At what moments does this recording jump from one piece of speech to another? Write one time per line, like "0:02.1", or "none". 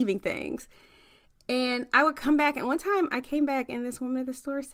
none